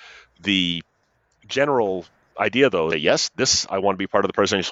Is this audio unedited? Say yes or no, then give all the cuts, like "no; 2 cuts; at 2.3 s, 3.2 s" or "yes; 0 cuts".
no; 1 cut; at 2.9 s